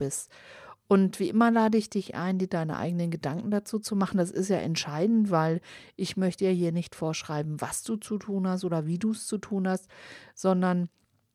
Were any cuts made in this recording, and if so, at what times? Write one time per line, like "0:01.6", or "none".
none